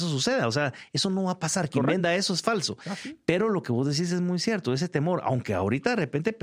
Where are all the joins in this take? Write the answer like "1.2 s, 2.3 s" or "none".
none